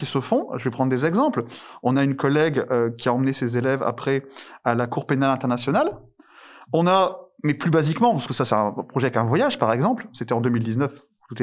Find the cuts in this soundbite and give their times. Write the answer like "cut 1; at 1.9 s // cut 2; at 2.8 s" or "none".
none